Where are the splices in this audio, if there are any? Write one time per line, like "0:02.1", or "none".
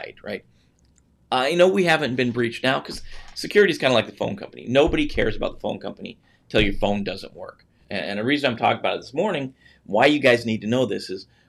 0:07.9